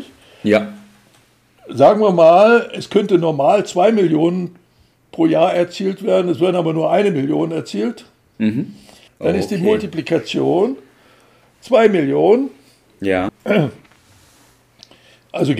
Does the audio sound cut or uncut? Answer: cut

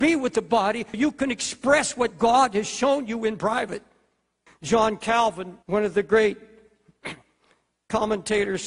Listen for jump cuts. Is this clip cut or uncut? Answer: cut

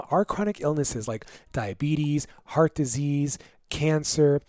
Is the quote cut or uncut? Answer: uncut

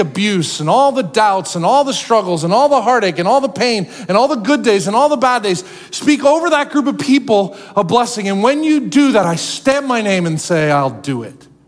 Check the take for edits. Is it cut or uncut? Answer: uncut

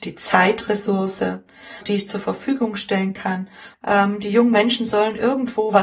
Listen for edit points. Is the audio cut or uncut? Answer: cut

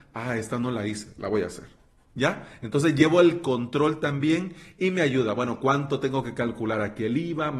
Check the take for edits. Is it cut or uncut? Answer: uncut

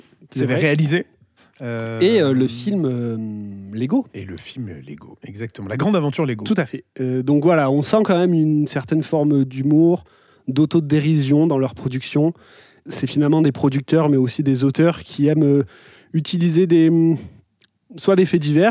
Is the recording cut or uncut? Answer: cut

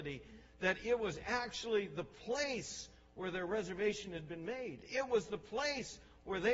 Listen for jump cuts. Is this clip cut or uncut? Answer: uncut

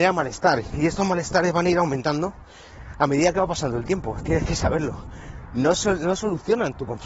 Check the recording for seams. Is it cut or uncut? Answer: cut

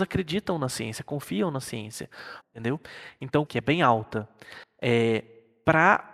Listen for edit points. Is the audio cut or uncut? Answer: cut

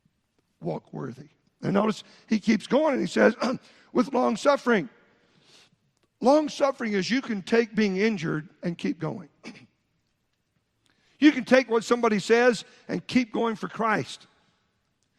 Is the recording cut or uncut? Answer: uncut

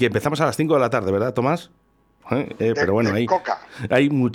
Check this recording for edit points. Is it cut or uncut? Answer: cut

